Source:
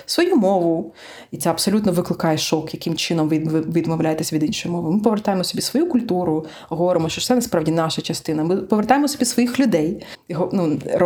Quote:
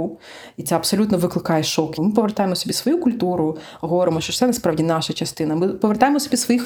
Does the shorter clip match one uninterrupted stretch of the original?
no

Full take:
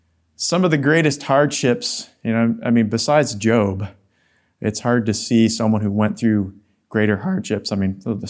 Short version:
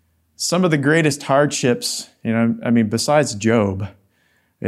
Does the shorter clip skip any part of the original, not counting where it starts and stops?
no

